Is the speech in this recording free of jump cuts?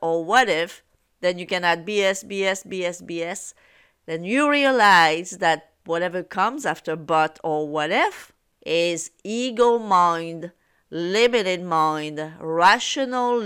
yes; 0 cuts

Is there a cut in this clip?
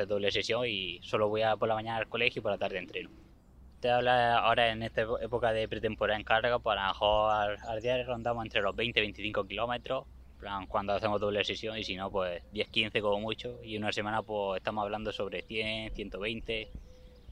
no; 0 cuts

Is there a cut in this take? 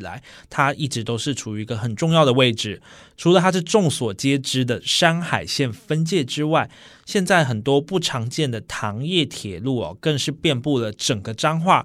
no; 0 cuts

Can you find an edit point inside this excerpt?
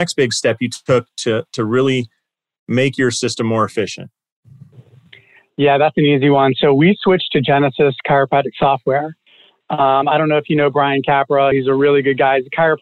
no; 0 cuts

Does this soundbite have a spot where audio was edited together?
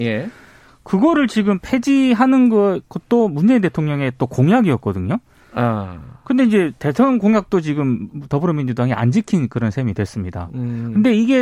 no; 0 cuts

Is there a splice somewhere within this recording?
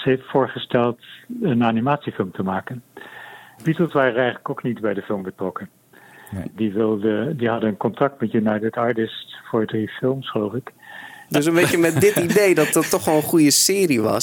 yes; 3 cuts; at 3.6 s, 6.5 s, 11.3 s

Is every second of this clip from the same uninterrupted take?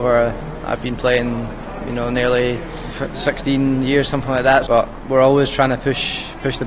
no; 1 cut; at 4.6 s

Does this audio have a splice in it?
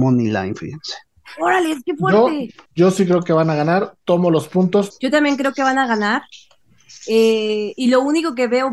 yes; 2 cuts; at 2.7 s, 4.9 s

